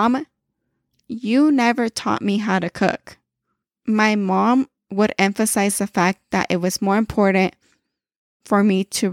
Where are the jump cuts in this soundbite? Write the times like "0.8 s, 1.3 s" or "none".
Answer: none